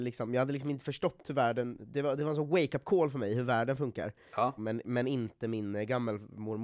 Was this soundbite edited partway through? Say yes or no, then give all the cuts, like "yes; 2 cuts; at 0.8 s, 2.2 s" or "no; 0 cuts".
yes; 1 cut; at 4.6 s